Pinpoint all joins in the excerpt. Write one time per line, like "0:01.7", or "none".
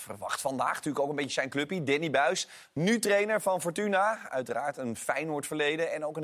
none